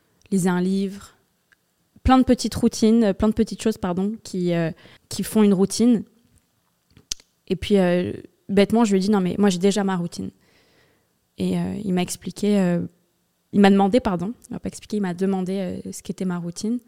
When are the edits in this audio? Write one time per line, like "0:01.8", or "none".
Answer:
0:05.0